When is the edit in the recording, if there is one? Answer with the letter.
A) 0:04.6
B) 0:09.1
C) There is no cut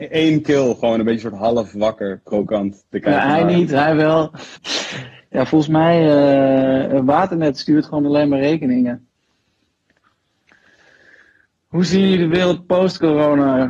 A